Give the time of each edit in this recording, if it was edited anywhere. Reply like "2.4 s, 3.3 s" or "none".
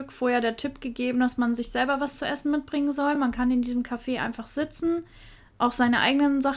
none